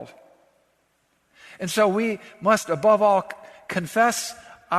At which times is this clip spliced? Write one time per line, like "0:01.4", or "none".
none